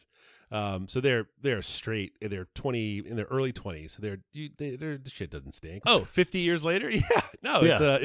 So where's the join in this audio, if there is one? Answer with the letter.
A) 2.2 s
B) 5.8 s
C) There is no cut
B